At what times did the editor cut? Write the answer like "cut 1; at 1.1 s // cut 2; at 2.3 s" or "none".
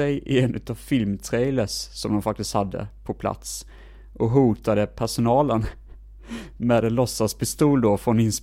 none